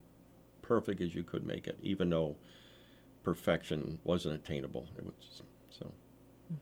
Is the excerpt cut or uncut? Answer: uncut